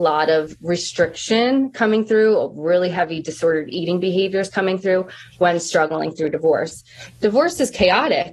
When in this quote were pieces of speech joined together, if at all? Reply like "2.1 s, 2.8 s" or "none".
none